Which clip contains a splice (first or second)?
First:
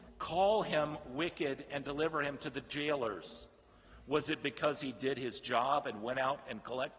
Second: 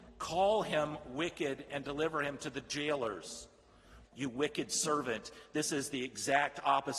second